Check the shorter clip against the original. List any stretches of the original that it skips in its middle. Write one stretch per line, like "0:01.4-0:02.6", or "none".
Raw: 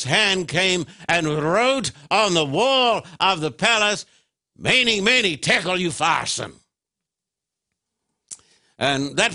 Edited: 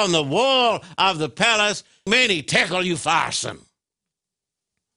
0:04.3-0:05.0

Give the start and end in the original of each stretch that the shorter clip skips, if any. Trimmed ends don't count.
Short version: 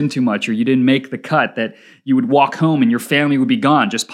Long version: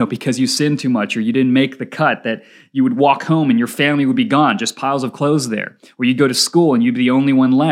none

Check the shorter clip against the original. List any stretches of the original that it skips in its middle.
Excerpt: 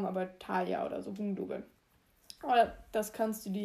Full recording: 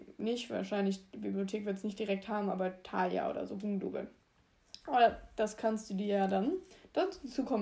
none

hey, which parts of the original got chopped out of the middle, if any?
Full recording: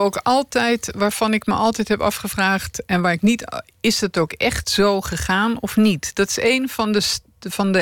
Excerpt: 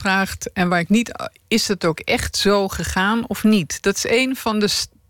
none

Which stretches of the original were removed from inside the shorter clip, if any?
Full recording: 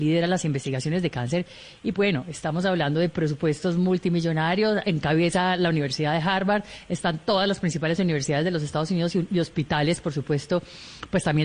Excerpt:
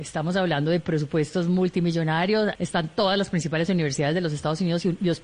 0:04.8-0:06.9

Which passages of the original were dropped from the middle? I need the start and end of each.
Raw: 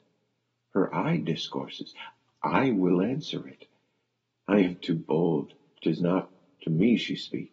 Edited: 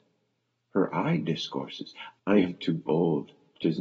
0:02.2-0:04.4

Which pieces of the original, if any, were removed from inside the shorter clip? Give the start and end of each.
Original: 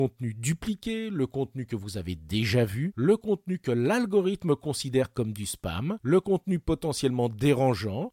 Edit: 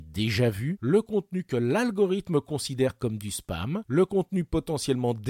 none

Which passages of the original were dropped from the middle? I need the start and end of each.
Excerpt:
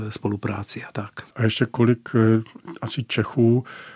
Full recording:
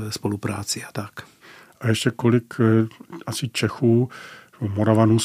0:01.3-0:01.7

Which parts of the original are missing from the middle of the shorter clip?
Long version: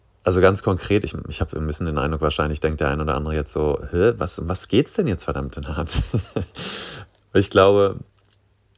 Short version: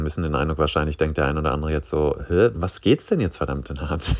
0:04.2-0:04.4

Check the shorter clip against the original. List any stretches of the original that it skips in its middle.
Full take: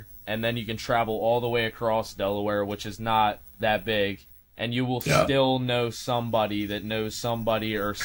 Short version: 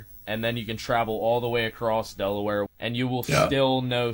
0:02.7-0:04.4

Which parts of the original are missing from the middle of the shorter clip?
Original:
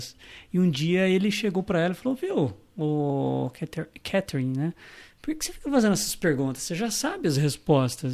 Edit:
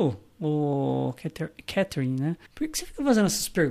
0:04.8-0:05.1

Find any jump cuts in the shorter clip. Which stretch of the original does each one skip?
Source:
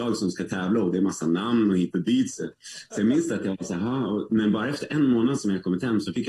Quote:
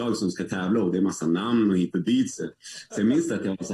none

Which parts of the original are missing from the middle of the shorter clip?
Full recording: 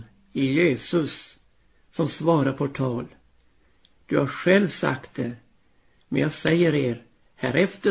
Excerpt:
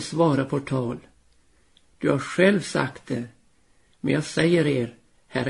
none

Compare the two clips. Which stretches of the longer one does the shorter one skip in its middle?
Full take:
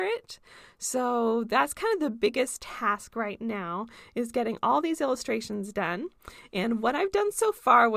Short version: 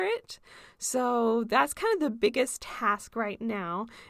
none

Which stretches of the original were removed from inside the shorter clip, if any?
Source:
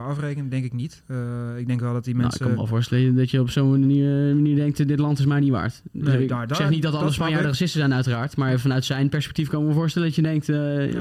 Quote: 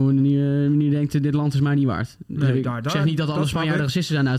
none

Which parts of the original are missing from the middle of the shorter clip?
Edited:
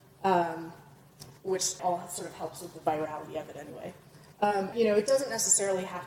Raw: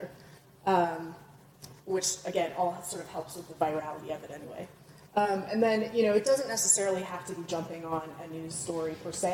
0:02.2-0:02.5
0:05.5-0:05.9

